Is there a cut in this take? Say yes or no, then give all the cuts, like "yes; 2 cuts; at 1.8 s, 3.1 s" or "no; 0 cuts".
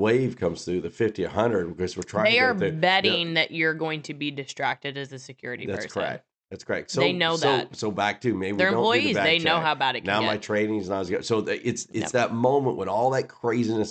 no; 0 cuts